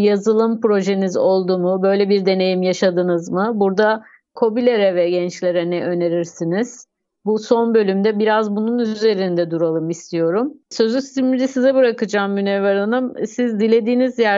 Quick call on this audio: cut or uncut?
uncut